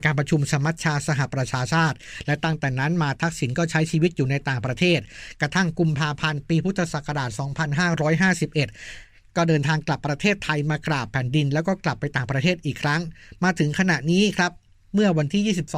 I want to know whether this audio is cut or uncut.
uncut